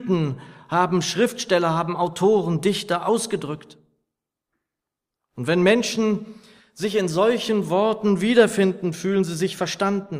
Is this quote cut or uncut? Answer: uncut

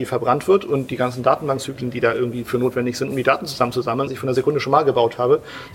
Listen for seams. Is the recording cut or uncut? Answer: cut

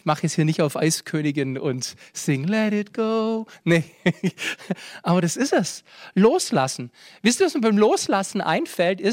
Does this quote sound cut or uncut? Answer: uncut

